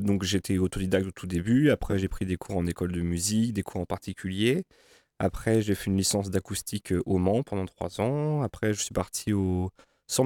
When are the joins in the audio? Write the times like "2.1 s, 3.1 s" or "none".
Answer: none